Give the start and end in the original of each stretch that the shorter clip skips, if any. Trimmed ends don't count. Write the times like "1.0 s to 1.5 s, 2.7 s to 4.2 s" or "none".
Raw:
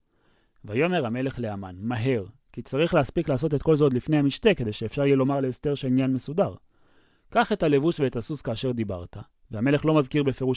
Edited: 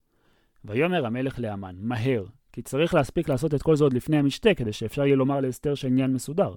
none